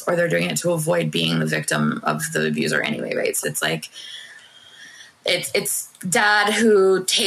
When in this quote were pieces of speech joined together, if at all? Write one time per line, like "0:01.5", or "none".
0:03.4